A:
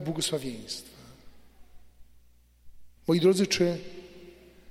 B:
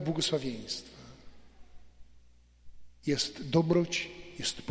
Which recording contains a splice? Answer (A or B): A